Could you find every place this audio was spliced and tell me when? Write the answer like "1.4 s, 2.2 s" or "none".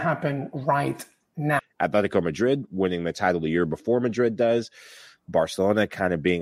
1.6 s